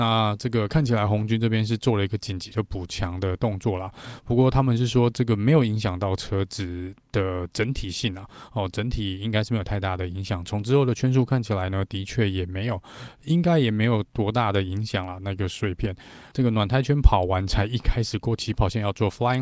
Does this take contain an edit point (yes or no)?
yes